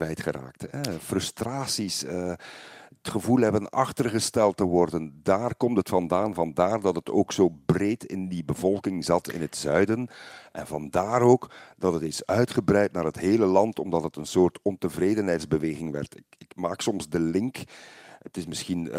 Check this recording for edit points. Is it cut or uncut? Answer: uncut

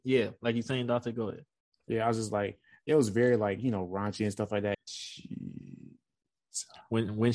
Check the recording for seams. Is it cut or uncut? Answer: cut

